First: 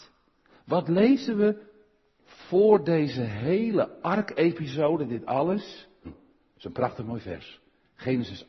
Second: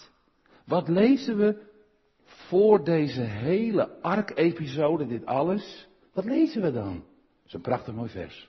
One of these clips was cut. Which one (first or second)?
first